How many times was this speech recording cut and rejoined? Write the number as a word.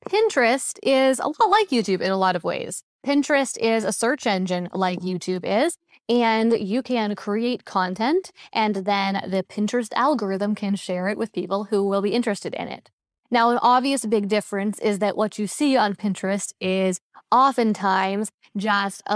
zero